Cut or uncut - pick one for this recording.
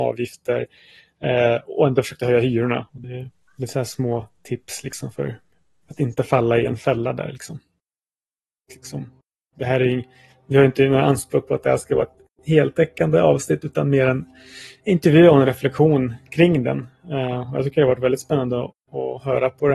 cut